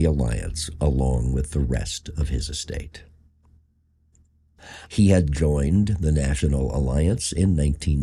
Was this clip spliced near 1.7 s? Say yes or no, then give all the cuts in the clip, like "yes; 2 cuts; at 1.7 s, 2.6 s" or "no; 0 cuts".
no; 1 cut; at 4.9 s